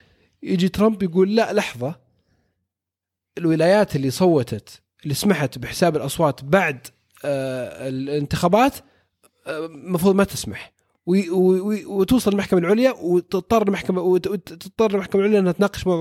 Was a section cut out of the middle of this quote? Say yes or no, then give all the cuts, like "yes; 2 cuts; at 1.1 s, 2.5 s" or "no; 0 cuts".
no; 0 cuts